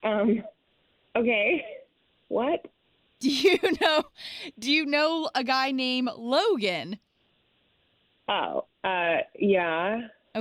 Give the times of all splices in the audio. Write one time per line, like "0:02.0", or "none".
none